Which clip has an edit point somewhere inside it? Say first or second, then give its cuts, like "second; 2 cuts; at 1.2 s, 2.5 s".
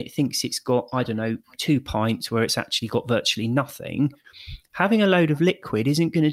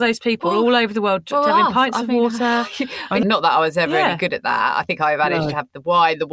second; 1 cut; at 3.2 s